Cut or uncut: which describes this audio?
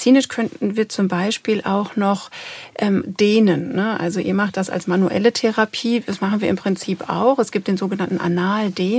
cut